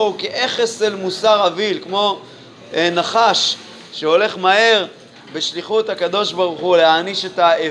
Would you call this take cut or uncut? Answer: uncut